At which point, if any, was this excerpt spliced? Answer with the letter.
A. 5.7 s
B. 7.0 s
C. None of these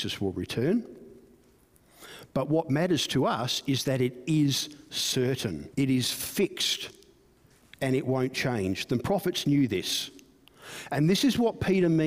A